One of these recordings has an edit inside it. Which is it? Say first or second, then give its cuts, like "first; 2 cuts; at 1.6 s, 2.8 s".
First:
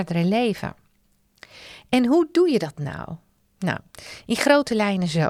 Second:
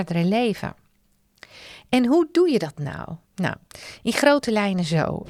second; 1 cut; at 3.2 s